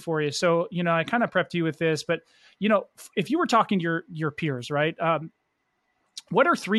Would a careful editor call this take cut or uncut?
uncut